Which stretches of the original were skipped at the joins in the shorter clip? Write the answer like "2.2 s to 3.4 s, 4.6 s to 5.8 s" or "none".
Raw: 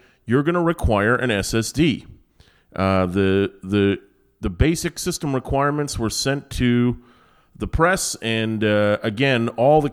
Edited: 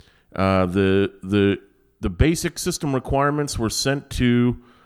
none